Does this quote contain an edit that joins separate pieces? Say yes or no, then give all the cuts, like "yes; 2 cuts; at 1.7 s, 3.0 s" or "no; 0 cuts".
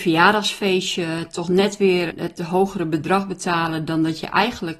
yes; 1 cut; at 2.1 s